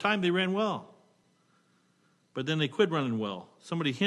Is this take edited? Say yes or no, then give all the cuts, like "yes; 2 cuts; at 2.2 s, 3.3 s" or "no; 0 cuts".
no; 0 cuts